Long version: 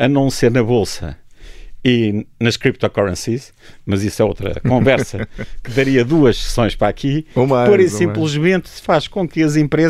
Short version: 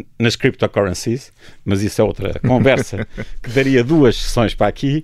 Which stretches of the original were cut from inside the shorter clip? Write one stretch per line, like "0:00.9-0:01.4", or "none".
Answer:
none